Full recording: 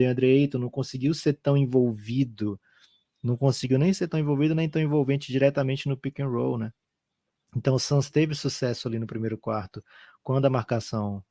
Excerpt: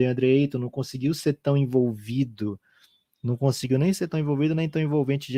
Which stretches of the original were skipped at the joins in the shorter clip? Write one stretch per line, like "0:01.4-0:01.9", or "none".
none